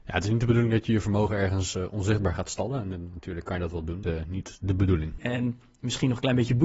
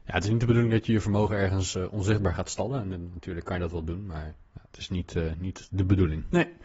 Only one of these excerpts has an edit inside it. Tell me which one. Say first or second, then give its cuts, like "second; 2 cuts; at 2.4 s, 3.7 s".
first; 2 cuts; at 4.0 s, 5.2 s